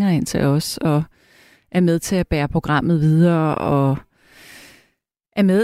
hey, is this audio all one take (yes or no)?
yes